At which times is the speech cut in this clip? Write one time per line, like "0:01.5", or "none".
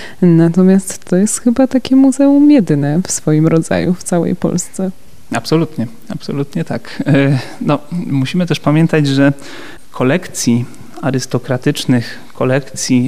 none